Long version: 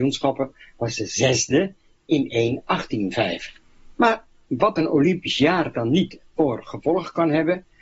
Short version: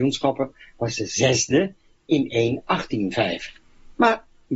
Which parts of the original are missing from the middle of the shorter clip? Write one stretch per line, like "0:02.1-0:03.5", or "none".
none